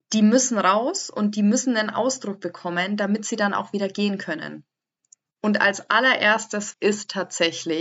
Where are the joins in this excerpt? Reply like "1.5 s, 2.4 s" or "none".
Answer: 5.3 s, 6.7 s